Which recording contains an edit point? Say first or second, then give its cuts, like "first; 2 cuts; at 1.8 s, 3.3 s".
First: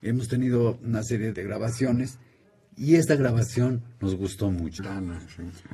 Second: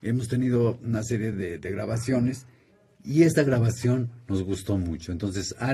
first; 2 cuts; at 1.3 s, 4.8 s